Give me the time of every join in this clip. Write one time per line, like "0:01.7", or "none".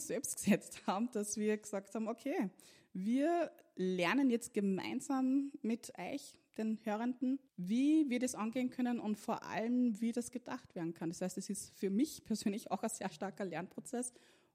0:07.5